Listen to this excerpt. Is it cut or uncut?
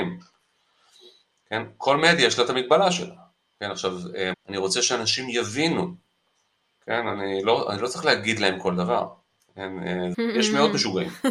cut